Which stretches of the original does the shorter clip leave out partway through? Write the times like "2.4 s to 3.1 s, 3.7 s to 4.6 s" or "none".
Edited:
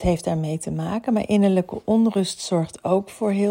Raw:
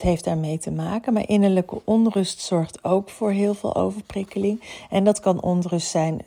none

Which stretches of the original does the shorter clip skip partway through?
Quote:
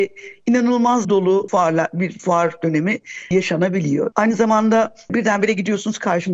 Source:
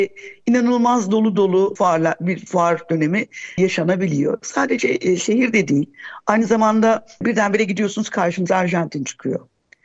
1.0 s to 1.3 s, 4.4 s to 6.2 s

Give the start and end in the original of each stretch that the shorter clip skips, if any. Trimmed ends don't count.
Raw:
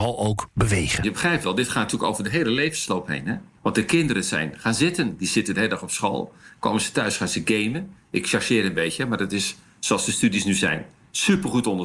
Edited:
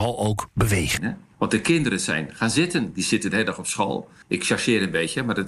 1.0 s to 3.2 s, 6.5 s to 8.0 s

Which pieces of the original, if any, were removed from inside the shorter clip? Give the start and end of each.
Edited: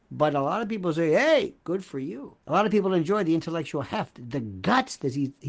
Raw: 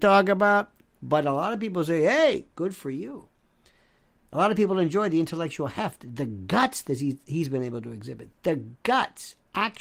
3.3 s to 4.3 s

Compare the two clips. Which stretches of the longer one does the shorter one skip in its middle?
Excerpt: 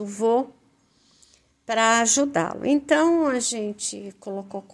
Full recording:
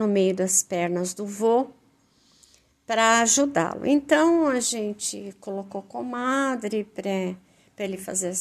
none

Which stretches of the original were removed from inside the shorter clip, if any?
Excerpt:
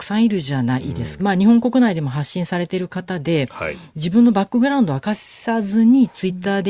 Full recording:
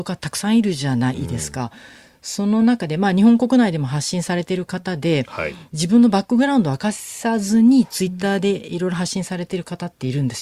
1.5 s to 3.0 s

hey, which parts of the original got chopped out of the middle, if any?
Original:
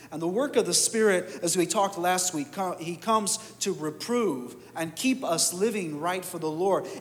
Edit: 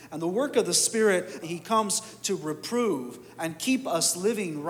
1.4 s to 2.8 s

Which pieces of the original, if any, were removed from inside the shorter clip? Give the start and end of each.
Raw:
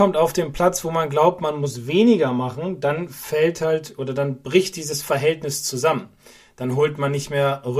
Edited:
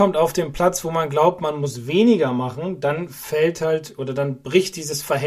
none

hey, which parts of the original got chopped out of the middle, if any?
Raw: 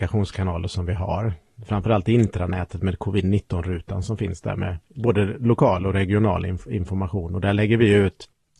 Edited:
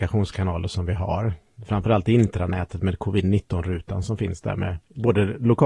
none

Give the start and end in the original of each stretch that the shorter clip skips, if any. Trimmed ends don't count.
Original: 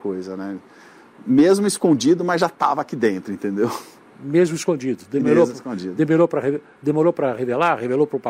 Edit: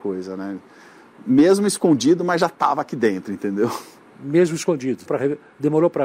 5.1 s to 6.3 s

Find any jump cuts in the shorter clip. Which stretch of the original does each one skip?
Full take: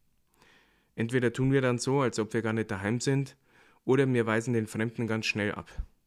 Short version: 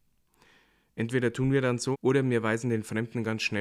1.9 s to 3.8 s

